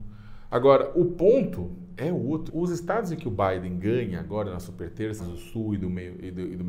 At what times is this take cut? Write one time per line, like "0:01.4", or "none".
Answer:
0:02.5
0:05.2